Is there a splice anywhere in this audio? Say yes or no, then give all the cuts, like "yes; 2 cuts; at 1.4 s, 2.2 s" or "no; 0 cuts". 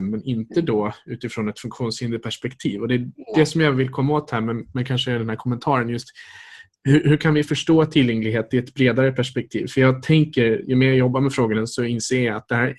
no; 0 cuts